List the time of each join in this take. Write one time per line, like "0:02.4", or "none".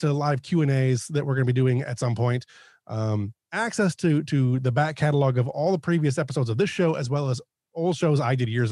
none